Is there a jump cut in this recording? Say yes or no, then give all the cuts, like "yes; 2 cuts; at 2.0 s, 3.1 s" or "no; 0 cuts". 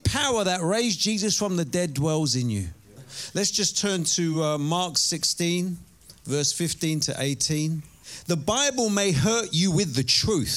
no; 0 cuts